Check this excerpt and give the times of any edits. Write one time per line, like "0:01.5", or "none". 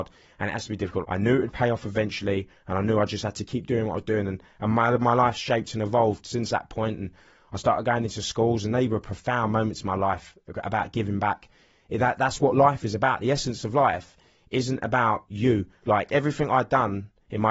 0:01.0